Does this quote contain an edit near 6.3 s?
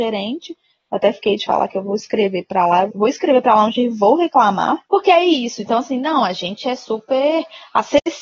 no; 1 cut; at 2.9 s

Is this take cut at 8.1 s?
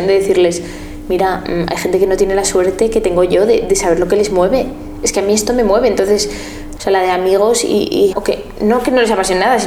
yes; 2 cuts; at 6.8 s, 8.1 s

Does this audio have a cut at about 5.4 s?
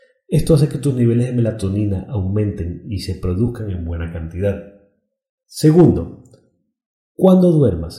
yes; 1 cut; at 5.4 s

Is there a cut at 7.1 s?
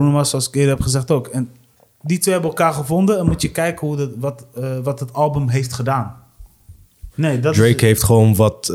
yes; 1 cut; at 7.1 s

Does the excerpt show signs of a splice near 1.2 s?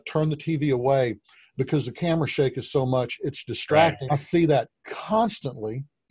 no; 1 cut; at 4.1 s

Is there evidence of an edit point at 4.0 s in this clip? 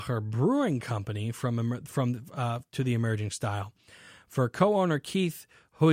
no; 0 cuts

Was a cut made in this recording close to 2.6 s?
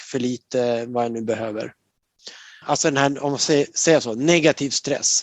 yes; 1 cut; at 2.6 s

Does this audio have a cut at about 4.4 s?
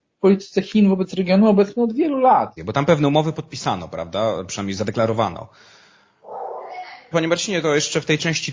no; 2 cuts; at 2.6 s, 7.1 s

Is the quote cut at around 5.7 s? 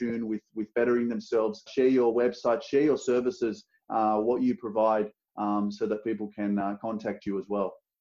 no; 1 cut; at 1.7 s

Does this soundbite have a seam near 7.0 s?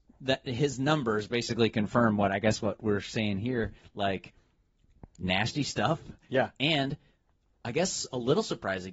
no; 0 cuts

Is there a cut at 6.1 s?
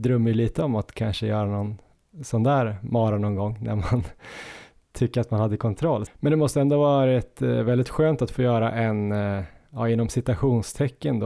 yes; 1 cut; at 6.1 s

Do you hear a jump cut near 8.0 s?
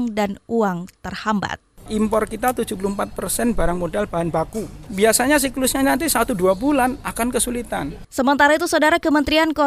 yes; 2 cuts; at 4.9 s, 8.0 s

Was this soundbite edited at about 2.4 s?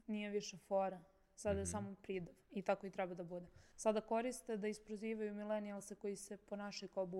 yes; 2 cuts; at 2.4 s, 3.7 s

